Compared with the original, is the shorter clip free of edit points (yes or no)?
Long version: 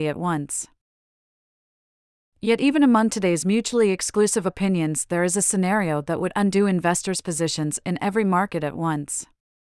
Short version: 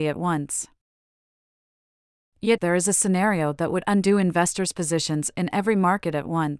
no